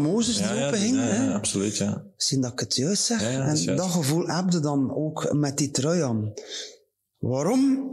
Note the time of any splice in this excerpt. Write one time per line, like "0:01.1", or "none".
none